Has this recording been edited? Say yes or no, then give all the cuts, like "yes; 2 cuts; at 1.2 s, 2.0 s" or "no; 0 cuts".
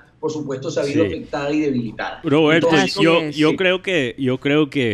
no; 0 cuts